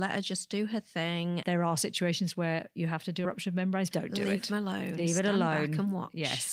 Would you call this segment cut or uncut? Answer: cut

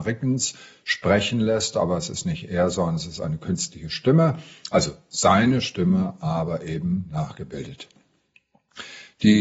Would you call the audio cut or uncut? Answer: uncut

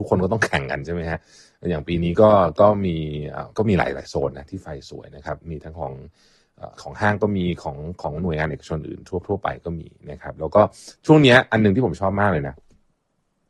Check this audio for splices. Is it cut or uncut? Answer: cut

